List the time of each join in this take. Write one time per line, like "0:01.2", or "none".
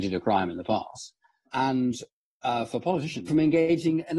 0:01.5
0:03.3

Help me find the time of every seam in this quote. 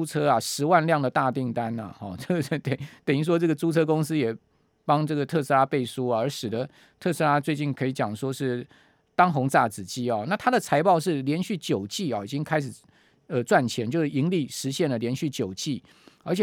none

